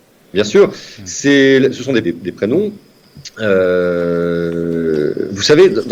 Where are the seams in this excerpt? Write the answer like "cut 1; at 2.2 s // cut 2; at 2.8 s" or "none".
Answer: cut 1; at 2.0 s